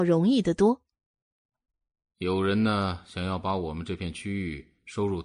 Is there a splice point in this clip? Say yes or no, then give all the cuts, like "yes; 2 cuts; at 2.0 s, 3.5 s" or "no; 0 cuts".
no; 0 cuts